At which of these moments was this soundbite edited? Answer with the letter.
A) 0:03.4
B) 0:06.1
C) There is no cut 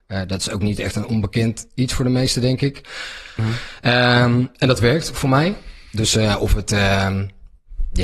A